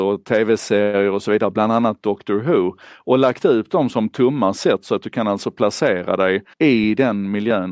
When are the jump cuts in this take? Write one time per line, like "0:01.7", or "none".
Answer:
0:03.9
0:06.5